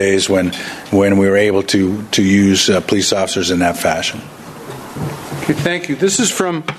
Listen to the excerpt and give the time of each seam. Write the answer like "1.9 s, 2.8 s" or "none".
none